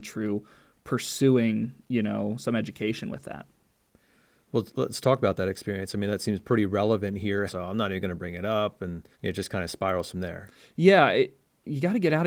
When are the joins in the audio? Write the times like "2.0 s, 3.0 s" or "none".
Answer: 7.5 s, 9.1 s

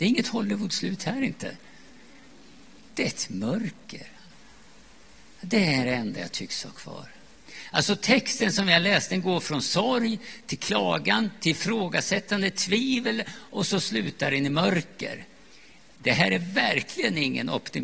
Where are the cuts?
none

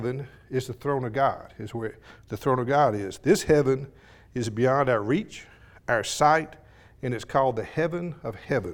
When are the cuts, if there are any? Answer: none

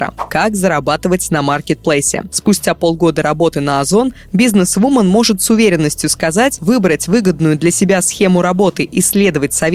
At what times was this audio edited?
6.6 s

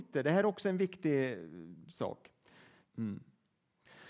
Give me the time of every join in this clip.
2.8 s

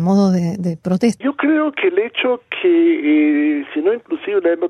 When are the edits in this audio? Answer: 1.2 s, 3.7 s

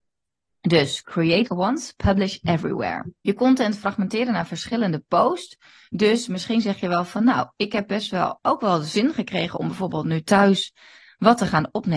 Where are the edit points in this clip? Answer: 1.5 s, 3.2 s, 8.4 s

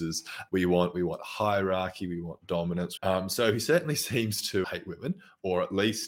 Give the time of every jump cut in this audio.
3.0 s, 4.6 s

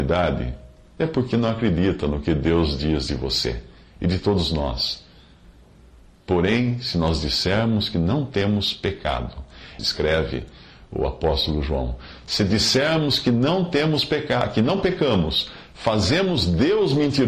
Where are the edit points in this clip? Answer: 9.8 s

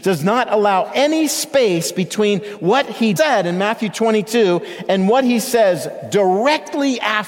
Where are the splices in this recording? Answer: 3.2 s

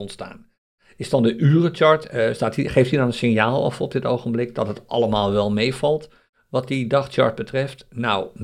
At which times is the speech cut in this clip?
none

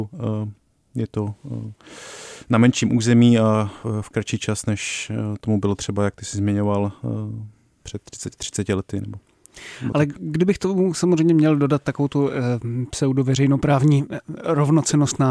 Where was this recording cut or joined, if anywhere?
4.1 s

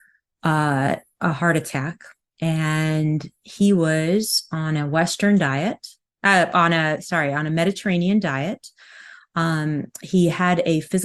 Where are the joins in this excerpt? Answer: none

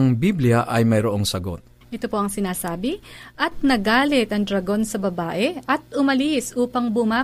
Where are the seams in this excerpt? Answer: 1.8 s

